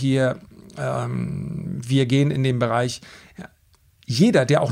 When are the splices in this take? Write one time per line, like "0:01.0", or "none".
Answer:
none